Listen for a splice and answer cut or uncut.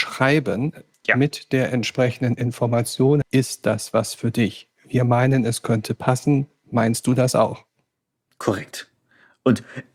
cut